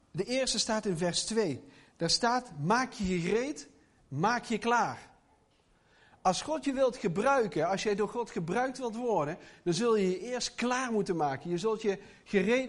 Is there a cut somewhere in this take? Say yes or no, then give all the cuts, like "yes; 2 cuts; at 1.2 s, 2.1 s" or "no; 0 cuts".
no; 0 cuts